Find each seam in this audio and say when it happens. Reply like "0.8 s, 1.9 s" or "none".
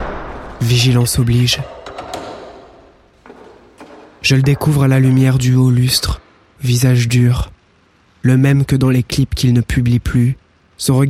6.6 s